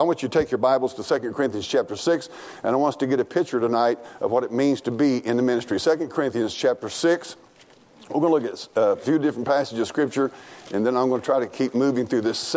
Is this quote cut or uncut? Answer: uncut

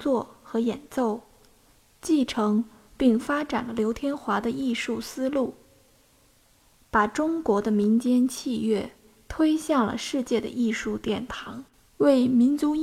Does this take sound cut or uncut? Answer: cut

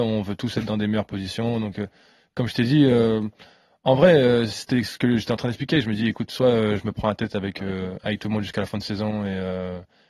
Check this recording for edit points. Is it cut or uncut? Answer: uncut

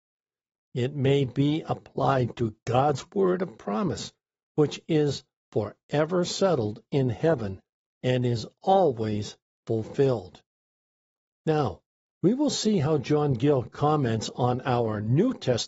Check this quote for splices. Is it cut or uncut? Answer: cut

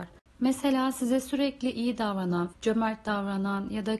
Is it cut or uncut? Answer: cut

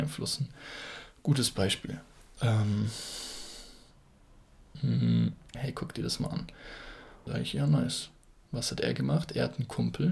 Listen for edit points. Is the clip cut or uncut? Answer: cut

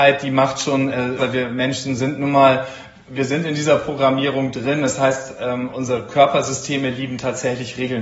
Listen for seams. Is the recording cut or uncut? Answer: cut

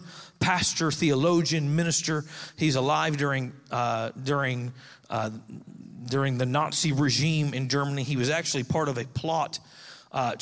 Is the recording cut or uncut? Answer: uncut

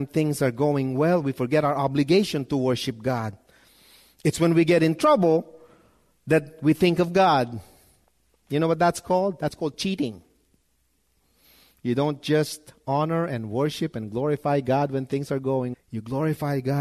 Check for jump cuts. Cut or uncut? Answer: cut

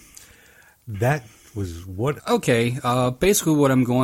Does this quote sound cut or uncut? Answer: cut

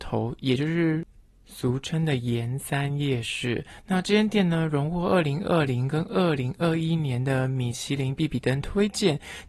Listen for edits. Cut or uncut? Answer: uncut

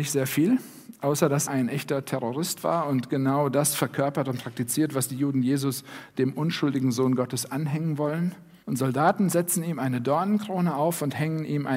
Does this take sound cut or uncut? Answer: cut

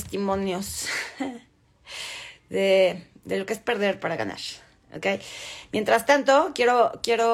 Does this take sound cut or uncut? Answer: uncut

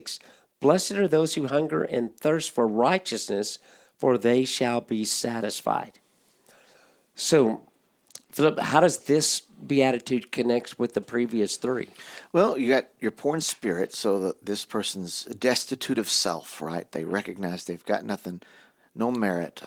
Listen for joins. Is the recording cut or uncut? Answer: uncut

